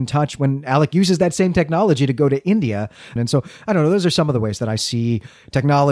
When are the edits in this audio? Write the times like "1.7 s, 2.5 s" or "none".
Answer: 3.2 s